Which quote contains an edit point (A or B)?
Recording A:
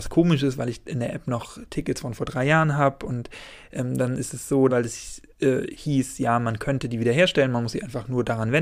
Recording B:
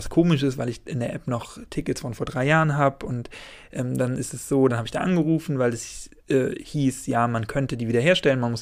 A